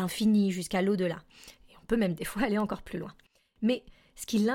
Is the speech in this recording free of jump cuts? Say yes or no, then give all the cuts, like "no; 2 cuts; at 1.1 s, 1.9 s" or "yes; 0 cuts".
yes; 0 cuts